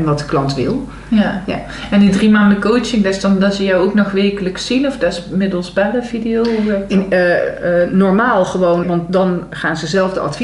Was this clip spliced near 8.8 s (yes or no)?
yes